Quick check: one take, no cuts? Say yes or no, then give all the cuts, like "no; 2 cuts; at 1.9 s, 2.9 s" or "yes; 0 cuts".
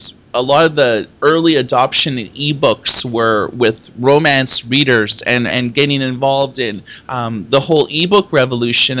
no; 1 cut; at 5.5 s